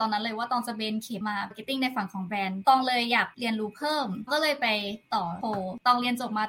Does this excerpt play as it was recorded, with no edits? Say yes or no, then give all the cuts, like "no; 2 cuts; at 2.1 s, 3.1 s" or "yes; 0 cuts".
no; 1 cut; at 1.2 s